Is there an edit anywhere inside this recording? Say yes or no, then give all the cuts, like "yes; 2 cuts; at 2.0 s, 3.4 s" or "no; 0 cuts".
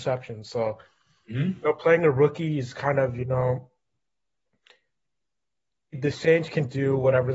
yes; 1 cut; at 5.9 s